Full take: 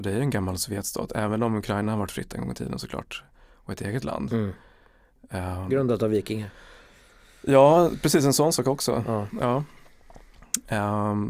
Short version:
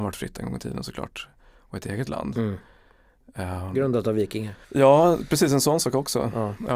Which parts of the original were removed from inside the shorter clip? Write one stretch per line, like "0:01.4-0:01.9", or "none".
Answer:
0:06.6-0:07.4